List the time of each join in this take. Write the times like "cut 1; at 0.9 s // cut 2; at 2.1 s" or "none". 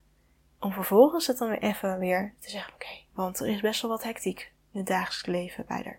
cut 1; at 3.1 s